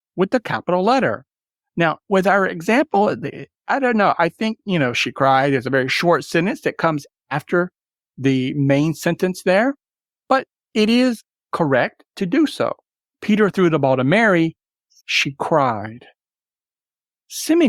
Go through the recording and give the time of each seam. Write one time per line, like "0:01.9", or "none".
0:13.1
0:15.0